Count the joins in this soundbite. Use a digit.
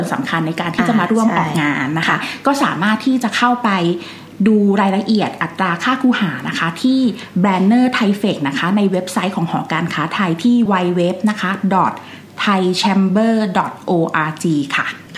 1